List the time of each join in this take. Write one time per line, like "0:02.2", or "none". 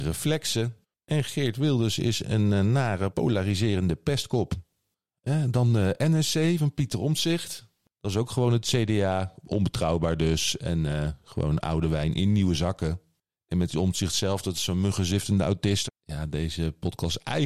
0:03.1
0:15.9